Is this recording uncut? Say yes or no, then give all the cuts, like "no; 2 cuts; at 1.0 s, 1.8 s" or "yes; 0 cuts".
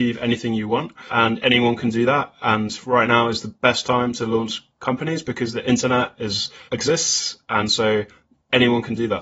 yes; 0 cuts